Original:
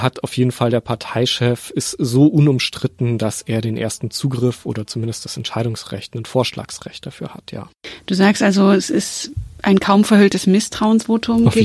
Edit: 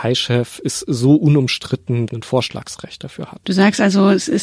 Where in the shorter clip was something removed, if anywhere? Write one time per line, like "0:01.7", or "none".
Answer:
0:02.1
0:03.4

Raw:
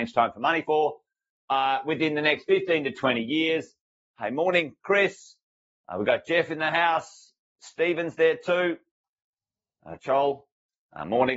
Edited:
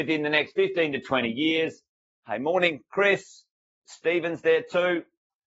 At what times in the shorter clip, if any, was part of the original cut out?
0:03.7

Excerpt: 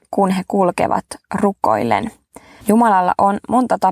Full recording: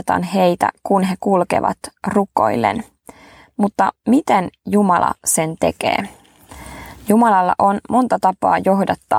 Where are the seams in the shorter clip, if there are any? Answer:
0:02.6

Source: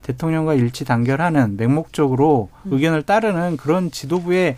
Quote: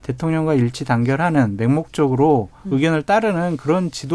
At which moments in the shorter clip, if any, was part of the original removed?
none

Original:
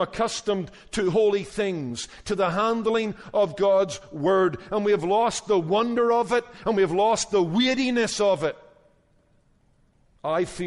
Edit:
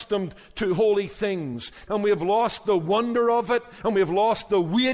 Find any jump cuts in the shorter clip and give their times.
0:01.9

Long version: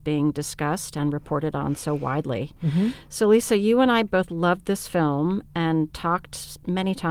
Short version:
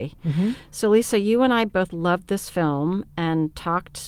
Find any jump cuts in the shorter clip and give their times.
none

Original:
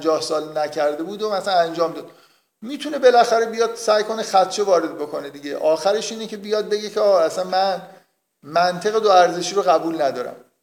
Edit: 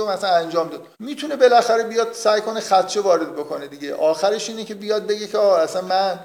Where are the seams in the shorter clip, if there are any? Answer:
0:00.9

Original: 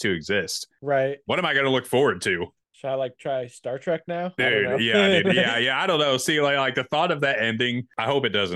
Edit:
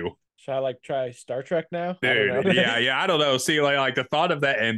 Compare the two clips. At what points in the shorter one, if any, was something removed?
0:02.4

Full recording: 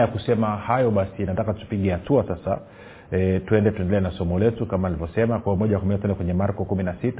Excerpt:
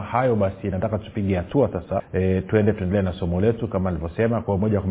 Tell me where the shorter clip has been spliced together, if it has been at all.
0:02.0

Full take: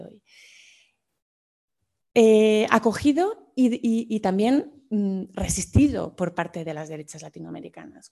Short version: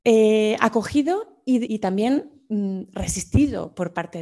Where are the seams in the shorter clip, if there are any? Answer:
0:01.7

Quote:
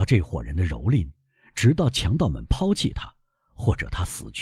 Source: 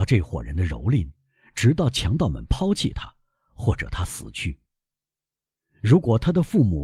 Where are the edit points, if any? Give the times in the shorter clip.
none

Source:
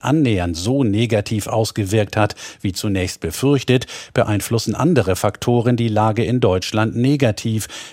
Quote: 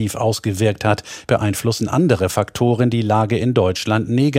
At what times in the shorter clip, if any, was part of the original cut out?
0:01.2

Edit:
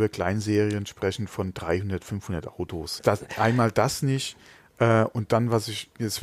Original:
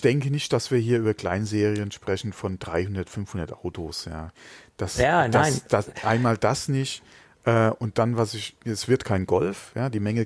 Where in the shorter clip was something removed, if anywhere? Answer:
0:03.0

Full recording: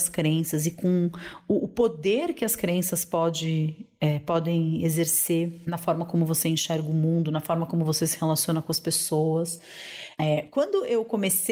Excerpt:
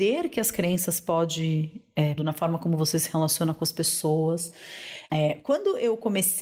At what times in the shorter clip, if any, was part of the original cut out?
0:02.2

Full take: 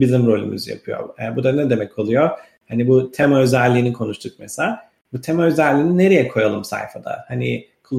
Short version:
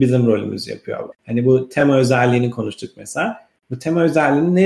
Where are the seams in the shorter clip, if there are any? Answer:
0:01.1

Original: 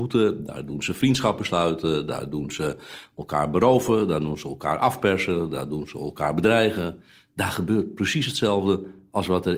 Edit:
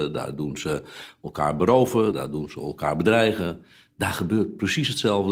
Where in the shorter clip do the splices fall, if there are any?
0:02.1

